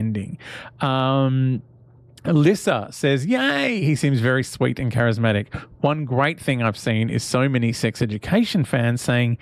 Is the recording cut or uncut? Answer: uncut